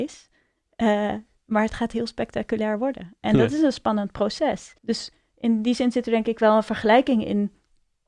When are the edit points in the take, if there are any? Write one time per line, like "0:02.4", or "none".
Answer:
0:04.8